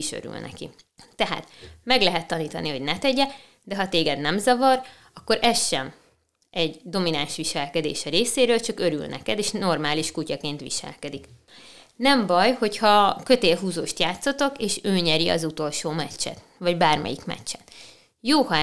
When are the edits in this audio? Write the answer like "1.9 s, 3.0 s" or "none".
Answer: none